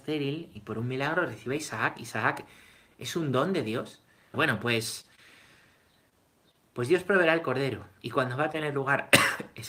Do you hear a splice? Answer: yes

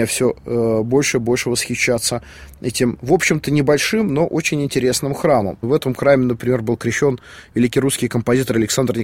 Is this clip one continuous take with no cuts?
yes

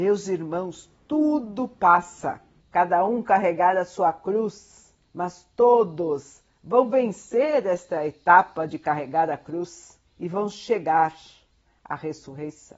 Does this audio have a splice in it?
yes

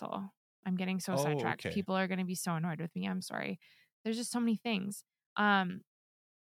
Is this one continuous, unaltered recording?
no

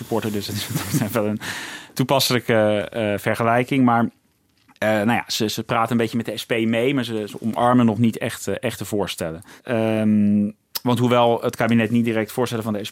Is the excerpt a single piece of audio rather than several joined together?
yes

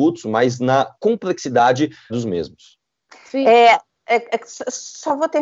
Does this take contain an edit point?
yes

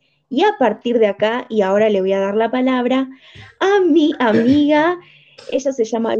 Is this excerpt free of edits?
yes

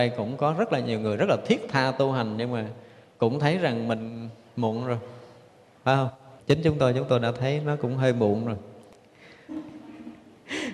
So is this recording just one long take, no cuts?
no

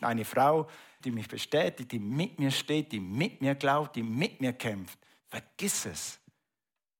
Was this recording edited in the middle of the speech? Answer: yes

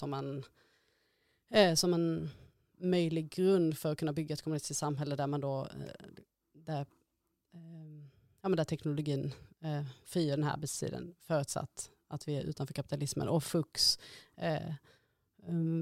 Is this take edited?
no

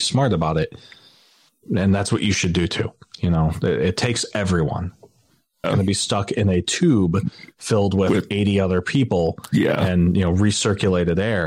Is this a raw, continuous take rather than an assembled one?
no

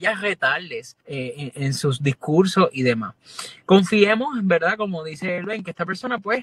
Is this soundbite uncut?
no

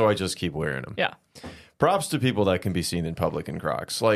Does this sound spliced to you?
no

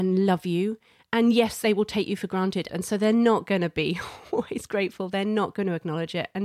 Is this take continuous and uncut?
no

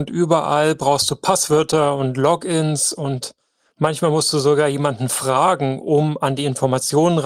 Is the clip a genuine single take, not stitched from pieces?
yes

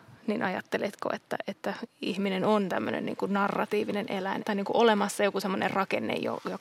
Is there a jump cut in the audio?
yes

